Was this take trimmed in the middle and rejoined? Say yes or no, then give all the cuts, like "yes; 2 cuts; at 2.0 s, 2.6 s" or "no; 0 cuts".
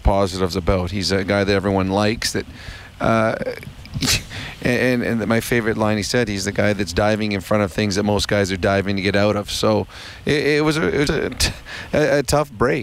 yes; 1 cut; at 11.1 s